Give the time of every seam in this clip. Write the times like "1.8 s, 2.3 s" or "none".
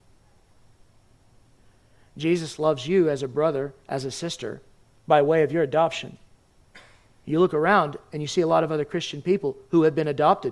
none